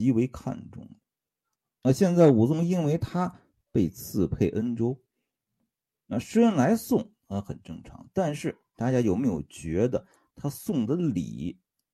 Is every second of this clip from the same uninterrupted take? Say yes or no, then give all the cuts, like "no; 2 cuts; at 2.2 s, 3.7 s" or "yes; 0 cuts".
yes; 0 cuts